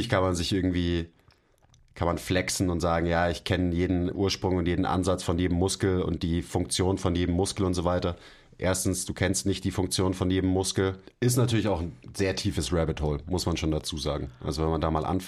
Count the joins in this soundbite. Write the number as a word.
one